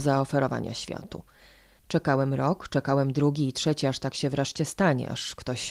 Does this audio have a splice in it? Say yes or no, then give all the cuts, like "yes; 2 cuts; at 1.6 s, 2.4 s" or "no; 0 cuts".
no; 0 cuts